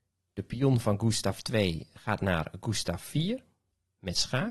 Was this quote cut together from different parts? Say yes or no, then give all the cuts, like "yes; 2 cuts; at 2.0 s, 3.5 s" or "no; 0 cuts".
no; 0 cuts